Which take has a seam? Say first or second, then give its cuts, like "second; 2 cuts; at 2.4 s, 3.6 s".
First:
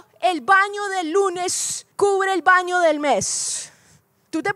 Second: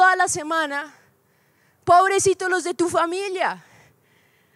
first; 1 cut; at 1.9 s